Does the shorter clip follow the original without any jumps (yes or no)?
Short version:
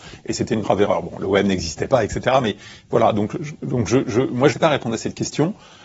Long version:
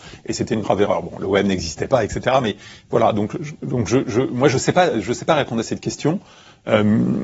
no